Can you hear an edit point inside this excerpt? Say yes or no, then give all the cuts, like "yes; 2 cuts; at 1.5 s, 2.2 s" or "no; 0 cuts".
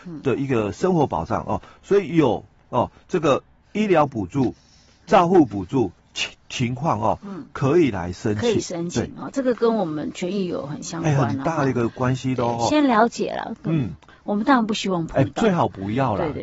yes; 1 cut; at 6.0 s